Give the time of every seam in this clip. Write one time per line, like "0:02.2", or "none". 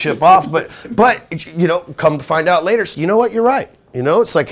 0:02.9